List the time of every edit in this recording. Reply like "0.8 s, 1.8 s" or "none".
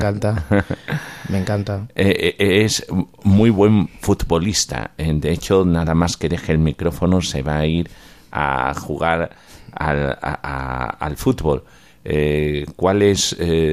none